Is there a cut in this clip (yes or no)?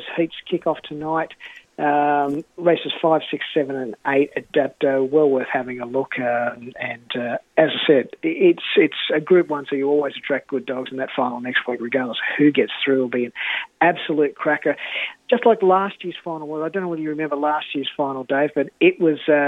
no